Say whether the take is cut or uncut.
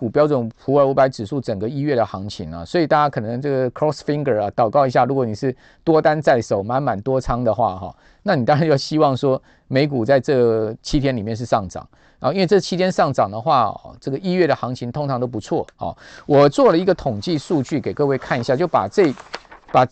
uncut